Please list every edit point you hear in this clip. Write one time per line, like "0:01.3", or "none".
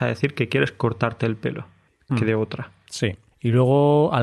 0:02.1